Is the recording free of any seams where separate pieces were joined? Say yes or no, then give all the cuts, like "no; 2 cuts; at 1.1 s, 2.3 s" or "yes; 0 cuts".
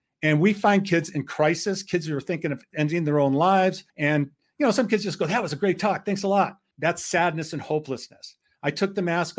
no; 2 cuts; at 3.9 s, 6.7 s